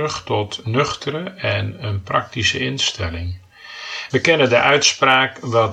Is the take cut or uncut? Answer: cut